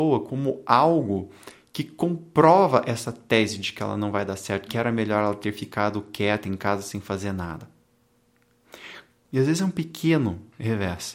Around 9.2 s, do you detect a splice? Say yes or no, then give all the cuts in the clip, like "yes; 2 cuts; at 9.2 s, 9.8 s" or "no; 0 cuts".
yes; 2 cuts; at 4.7 s, 9.2 s